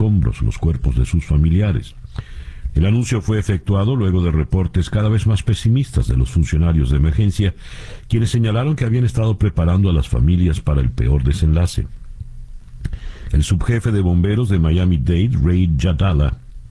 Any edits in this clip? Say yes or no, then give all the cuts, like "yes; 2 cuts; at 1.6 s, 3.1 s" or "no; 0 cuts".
yes; 1 cut; at 2.7 s